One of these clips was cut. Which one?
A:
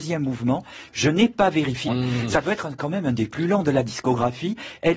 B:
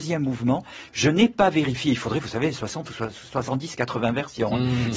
A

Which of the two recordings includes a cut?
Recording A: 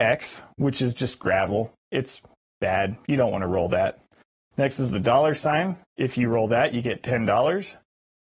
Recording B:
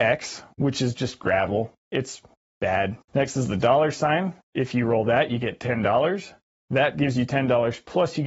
B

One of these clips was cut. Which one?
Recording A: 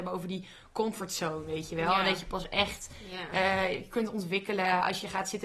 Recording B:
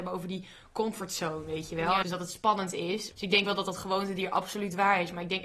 B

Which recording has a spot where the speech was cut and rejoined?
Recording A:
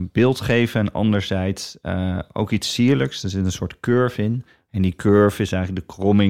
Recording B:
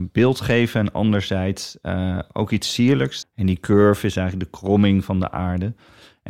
B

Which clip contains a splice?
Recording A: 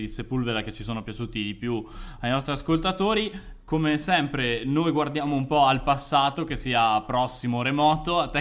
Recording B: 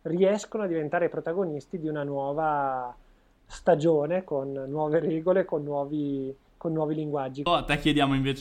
B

